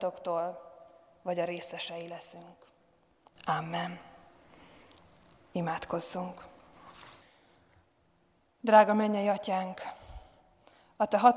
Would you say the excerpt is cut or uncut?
uncut